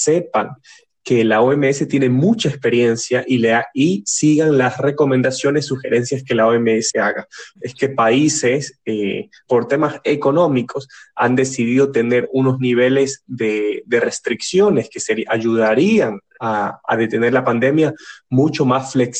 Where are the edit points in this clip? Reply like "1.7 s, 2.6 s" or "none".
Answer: 7.6 s, 9.5 s

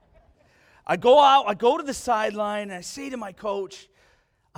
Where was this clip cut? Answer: none

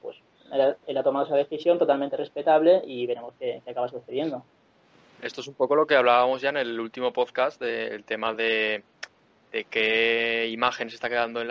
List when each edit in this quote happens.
none

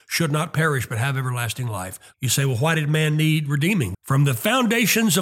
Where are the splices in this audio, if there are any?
2.1 s, 3.9 s

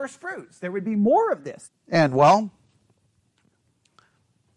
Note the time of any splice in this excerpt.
1.7 s

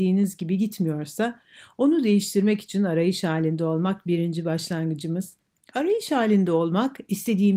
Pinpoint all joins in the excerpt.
5.6 s

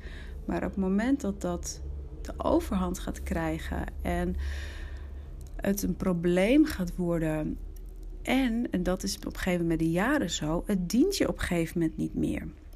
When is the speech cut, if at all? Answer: none

